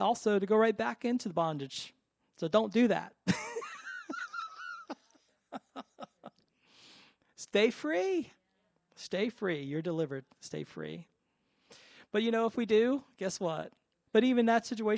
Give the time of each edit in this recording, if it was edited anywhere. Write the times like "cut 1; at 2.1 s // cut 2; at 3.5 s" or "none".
cut 1; at 14.1 s